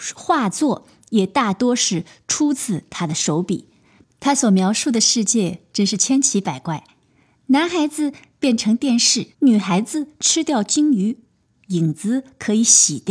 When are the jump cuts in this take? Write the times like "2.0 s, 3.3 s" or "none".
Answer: 4.0 s, 9.3 s